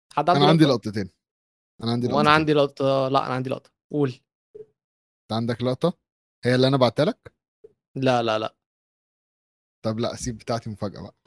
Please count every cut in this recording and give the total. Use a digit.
0